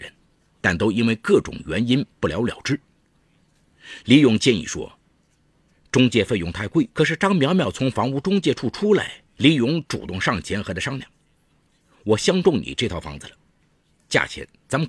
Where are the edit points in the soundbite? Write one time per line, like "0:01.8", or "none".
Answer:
0:04.0
0:06.9
0:09.3